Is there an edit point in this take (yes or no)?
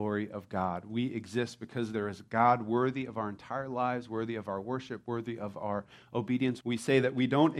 yes